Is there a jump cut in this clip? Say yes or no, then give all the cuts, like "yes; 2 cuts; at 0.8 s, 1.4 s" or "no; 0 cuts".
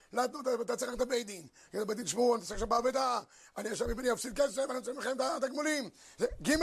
no; 0 cuts